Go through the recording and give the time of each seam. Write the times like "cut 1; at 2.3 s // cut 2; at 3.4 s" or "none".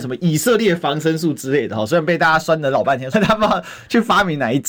cut 1; at 3.1 s